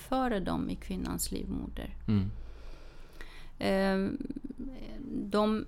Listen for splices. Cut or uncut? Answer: uncut